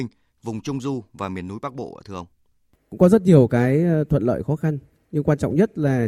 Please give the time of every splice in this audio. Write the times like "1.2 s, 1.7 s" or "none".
2.8 s